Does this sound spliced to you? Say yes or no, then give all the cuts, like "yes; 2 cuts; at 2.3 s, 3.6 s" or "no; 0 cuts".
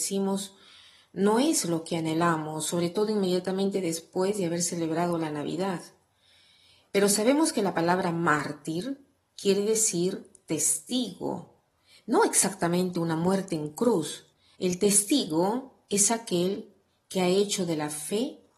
yes; 1 cut; at 14.6 s